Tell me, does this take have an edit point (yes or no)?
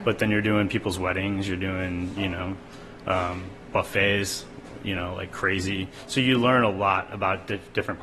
no